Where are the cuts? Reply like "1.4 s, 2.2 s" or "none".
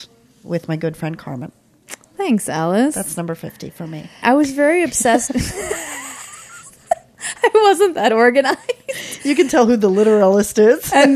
4.2 s

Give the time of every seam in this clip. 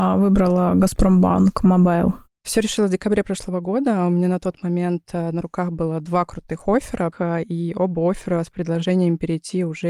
7.1 s

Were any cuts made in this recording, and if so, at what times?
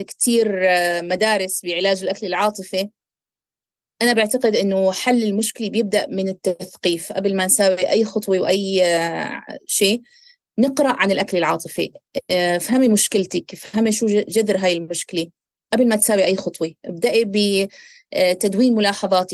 none

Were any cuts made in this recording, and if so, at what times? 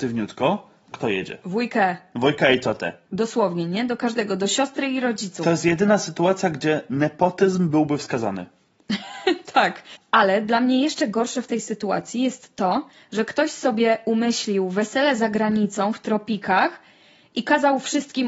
0.9 s, 3.1 s

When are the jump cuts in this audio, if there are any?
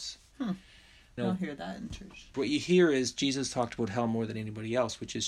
1.2 s, 2.3 s

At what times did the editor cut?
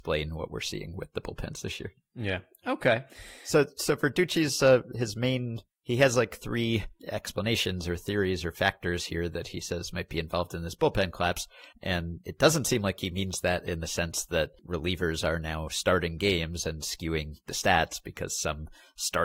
11.7 s

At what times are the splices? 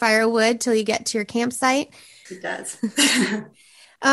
2.3 s

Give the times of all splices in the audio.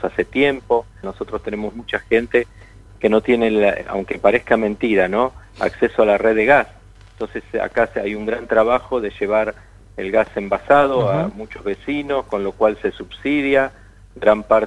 1.0 s

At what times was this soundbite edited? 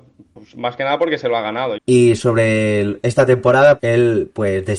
1.8 s, 3.8 s

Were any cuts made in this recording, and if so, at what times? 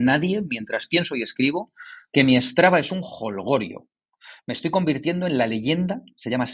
none

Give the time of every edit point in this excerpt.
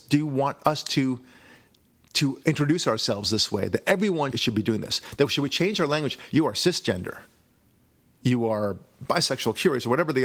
4.3 s, 6.3 s

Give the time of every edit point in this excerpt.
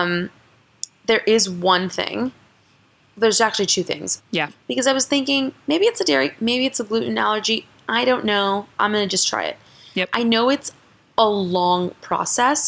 4.2 s

